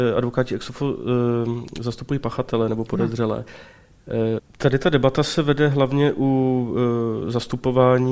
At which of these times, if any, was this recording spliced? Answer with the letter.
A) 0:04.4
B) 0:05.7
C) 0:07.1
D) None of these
A